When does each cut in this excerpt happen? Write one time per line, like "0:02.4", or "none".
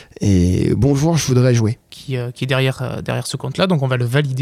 0:01.8